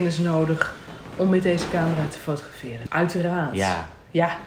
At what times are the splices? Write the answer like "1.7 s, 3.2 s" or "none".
2.9 s